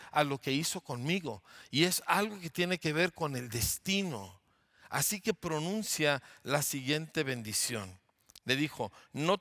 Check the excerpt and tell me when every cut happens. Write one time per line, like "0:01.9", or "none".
none